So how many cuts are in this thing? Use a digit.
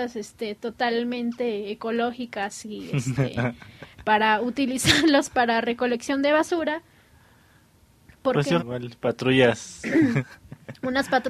2